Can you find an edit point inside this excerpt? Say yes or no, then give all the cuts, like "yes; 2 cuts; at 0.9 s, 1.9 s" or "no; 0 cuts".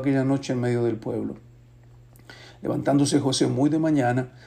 no; 0 cuts